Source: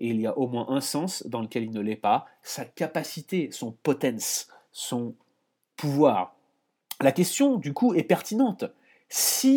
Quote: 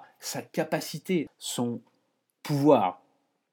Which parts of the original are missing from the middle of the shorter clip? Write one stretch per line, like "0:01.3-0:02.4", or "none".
0:03.5-0:04.6